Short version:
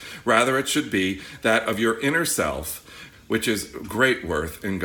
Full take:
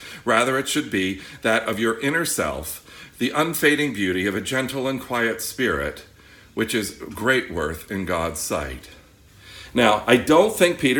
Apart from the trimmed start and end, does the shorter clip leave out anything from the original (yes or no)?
yes